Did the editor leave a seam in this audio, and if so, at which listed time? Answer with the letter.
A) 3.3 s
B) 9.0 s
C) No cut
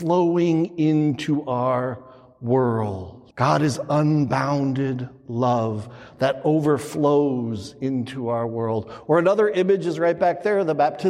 A